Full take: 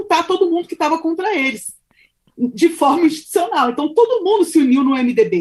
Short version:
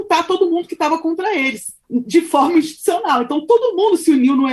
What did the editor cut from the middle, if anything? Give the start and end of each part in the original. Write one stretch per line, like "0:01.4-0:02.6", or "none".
0:01.8-0:02.3